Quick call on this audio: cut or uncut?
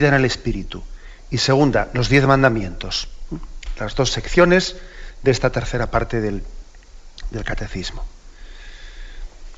uncut